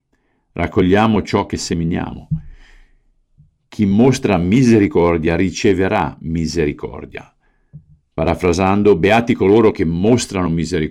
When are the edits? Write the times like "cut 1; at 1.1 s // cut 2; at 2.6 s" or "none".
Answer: none